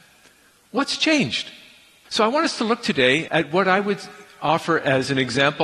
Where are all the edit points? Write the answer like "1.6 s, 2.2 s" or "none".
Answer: 2.1 s, 3.3 s

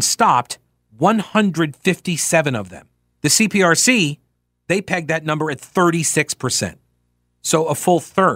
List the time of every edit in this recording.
3.1 s

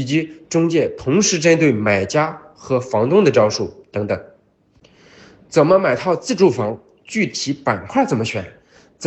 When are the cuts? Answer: none

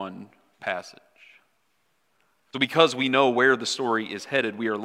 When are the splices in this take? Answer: none

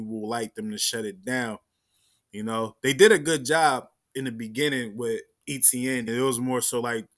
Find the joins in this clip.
6.1 s

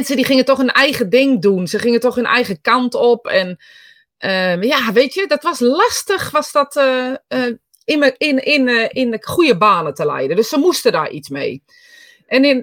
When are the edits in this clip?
none

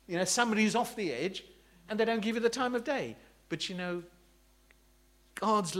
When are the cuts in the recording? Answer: none

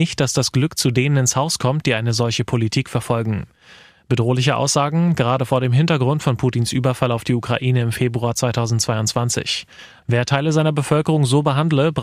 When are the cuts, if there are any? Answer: 10.0 s

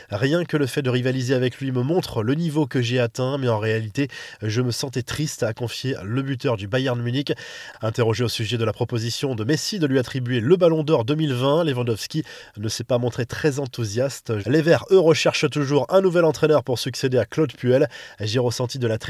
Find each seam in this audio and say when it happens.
14.4 s, 18.1 s

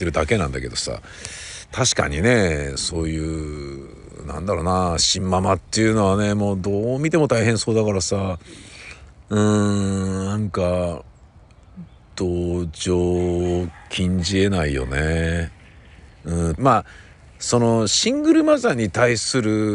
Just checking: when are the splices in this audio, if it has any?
16.6 s

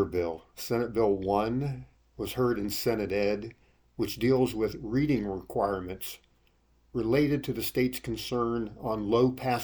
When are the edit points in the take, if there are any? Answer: none

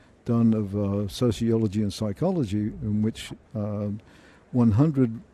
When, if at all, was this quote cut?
none

